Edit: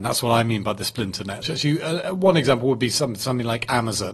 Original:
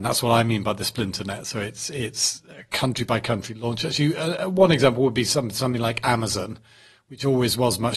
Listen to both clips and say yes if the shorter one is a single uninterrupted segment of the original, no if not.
no